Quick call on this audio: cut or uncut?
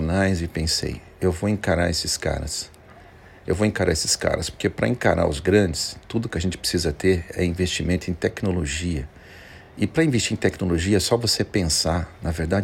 uncut